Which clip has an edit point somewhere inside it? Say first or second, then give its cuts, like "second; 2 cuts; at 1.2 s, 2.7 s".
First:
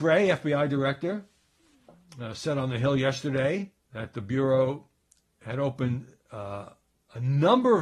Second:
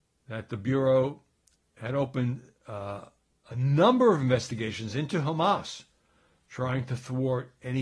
first; 1 cut; at 3.8 s